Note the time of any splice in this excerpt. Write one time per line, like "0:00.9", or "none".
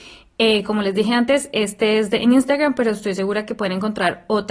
none